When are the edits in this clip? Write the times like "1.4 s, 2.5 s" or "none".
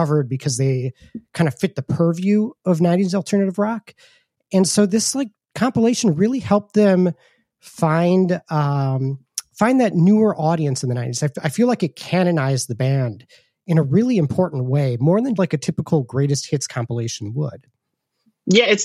15.4 s